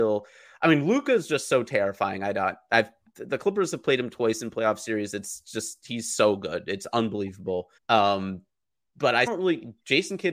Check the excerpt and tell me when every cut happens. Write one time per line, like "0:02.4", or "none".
0:07.8
0:09.3